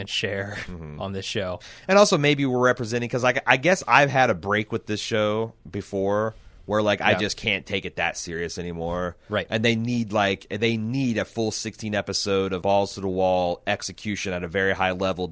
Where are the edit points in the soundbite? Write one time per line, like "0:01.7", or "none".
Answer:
0:12.6